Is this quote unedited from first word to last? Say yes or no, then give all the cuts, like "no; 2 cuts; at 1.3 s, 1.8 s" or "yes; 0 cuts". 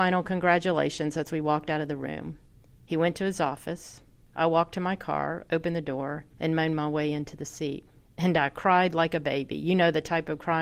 yes; 0 cuts